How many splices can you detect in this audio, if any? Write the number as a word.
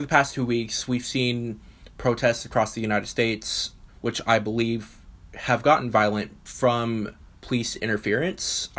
two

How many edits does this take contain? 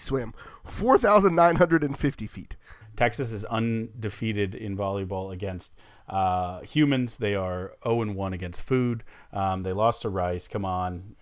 one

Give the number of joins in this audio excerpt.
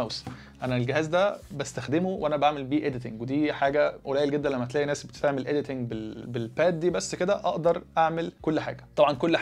one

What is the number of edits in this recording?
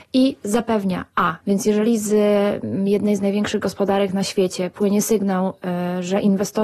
one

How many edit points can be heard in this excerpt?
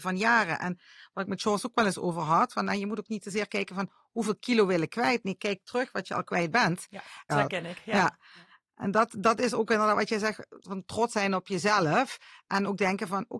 one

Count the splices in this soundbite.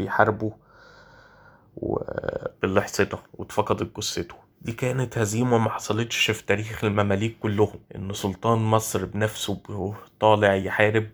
three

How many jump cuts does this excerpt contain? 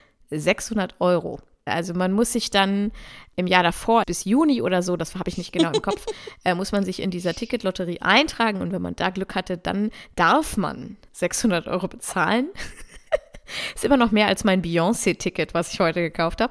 two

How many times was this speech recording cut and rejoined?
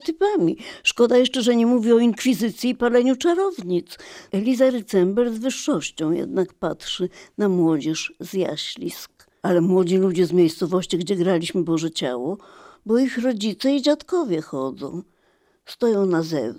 three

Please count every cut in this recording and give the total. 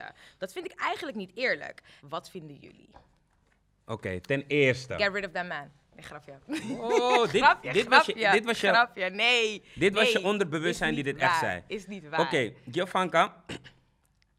one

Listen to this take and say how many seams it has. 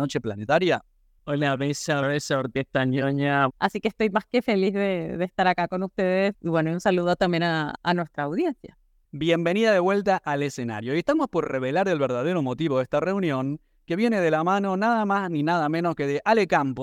two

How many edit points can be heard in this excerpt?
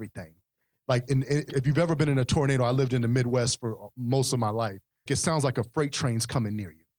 two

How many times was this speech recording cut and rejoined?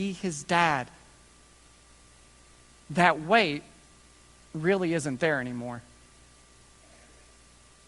zero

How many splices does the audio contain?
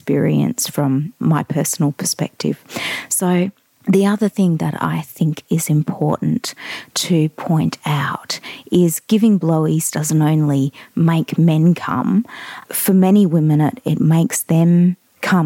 zero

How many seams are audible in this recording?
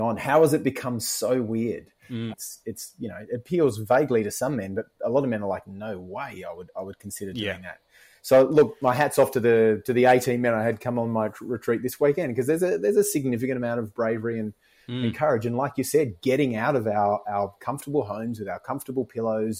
one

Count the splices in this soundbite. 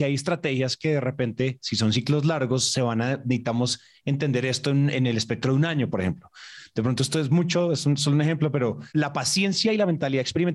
zero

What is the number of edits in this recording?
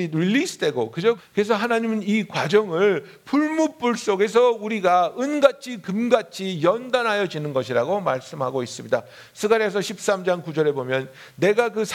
one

